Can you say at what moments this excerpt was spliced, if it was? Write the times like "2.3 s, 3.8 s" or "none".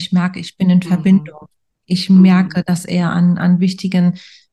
none